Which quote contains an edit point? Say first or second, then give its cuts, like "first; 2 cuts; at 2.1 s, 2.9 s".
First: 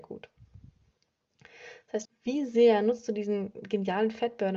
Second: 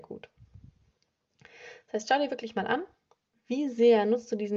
first; 1 cut; at 2.1 s